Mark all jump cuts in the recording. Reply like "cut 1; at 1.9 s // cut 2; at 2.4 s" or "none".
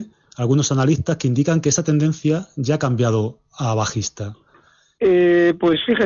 cut 1; at 5.0 s